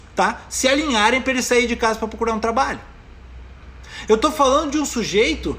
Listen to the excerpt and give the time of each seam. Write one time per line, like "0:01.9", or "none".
none